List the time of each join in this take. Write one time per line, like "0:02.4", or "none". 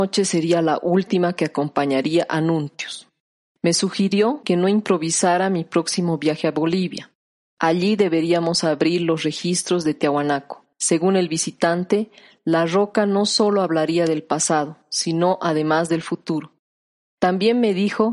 0:10.7